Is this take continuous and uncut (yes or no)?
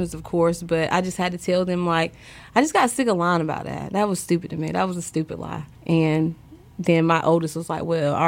no